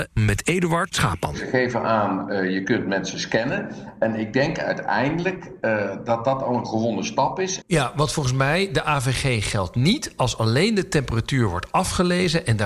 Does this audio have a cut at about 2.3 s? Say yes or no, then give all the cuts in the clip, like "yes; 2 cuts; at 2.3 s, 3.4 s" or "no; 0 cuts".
no; 1 cut; at 7.6 s